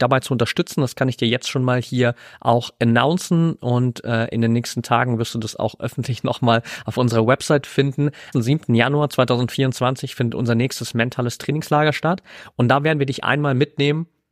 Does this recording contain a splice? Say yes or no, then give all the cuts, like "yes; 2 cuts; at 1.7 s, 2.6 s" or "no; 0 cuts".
yes; 1 cut; at 8.3 s